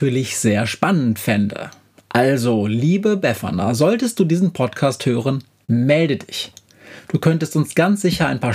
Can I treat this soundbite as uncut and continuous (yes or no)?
yes